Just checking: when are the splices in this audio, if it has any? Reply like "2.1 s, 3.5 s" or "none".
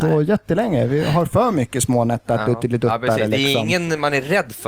none